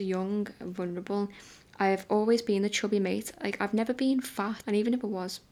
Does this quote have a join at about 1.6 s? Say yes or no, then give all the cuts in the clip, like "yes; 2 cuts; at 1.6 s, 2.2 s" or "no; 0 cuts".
no; 1 cut; at 4.6 s